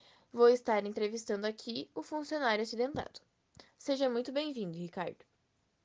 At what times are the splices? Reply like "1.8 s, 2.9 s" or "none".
none